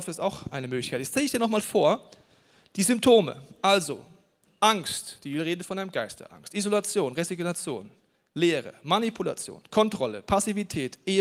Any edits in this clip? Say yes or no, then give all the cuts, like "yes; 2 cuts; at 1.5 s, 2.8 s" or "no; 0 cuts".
no; 0 cuts